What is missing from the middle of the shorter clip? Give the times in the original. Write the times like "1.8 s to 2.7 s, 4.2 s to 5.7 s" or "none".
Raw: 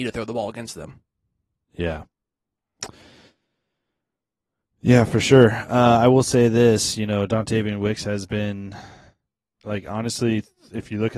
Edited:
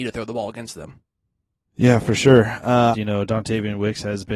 1.6 s to 4.7 s, 6.0 s to 6.9 s